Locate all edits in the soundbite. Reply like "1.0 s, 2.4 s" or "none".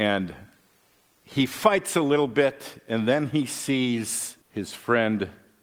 4.4 s